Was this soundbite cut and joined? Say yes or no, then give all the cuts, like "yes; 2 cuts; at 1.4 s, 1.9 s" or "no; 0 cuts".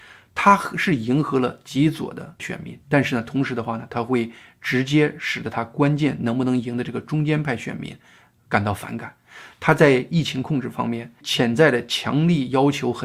no; 0 cuts